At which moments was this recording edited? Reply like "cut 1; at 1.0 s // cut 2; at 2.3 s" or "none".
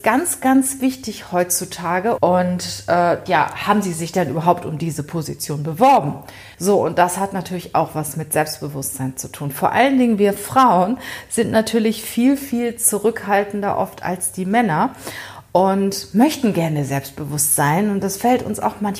cut 1; at 2.2 s // cut 2; at 3.3 s // cut 3; at 6.5 s